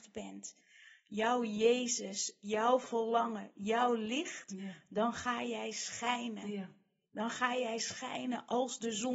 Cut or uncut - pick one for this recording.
uncut